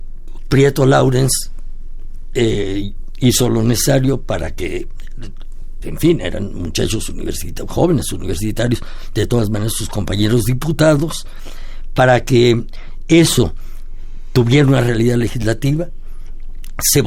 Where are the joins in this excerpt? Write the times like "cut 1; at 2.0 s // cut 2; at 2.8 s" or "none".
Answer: cut 1; at 5.8 s